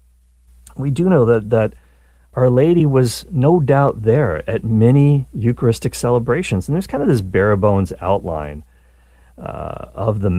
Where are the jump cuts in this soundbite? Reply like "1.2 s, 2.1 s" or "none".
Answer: none

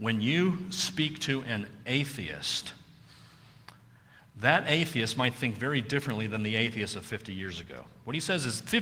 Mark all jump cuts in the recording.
none

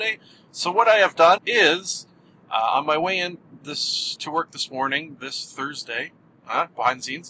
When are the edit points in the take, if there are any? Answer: 1.4 s

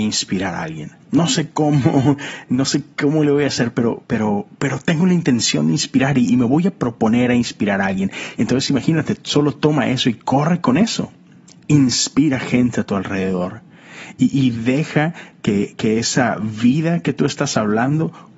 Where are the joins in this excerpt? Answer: 1.0 s, 8.4 s

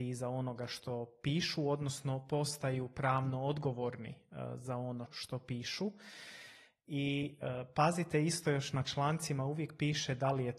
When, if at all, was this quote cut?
5.1 s

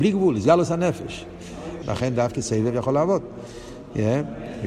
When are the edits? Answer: 1.8 s

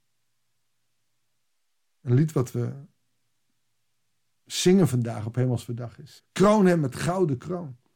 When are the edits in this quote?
6.2 s

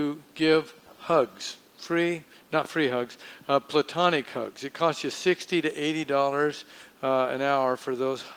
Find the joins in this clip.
none

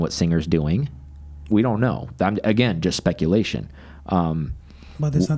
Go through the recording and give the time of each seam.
1.5 s

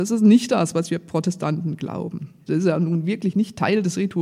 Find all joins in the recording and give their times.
2.5 s

